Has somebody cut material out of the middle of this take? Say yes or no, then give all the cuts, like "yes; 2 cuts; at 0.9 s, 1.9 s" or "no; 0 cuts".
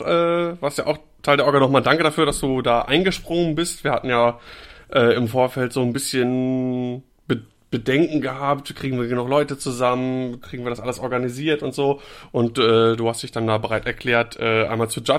no; 0 cuts